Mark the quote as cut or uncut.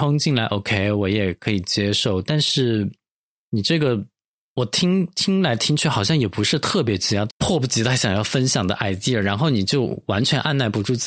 cut